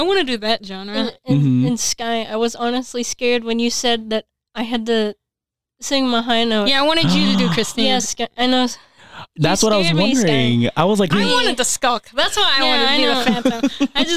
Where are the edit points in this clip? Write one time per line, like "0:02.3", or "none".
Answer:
0:11.1